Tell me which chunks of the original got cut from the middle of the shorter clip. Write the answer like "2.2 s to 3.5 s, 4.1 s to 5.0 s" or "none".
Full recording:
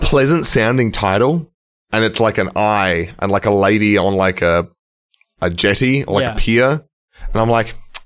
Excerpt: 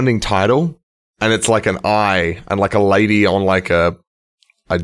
none